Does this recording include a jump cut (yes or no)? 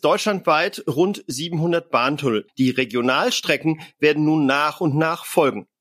yes